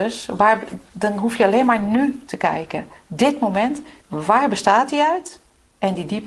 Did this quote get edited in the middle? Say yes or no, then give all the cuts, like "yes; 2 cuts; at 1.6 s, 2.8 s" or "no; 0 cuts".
yes; 1 cut; at 4.0 s